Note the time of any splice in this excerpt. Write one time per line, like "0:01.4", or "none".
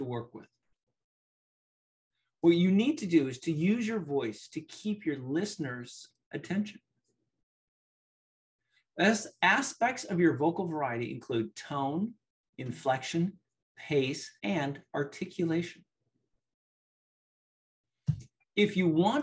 0:12.4
0:14.4